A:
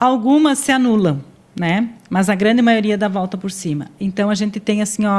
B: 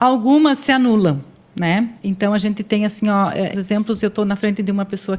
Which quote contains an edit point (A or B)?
B